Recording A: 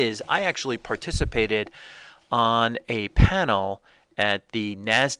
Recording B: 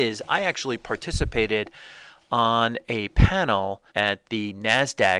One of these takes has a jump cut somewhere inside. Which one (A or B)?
B